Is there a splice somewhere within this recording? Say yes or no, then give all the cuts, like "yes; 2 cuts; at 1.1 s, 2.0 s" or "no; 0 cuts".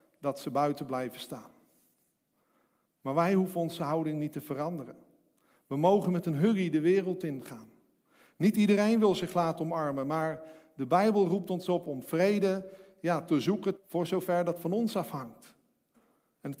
yes; 1 cut; at 13.8 s